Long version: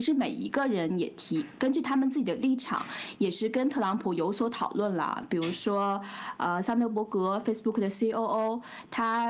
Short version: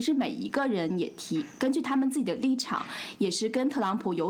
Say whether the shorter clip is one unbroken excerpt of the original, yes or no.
yes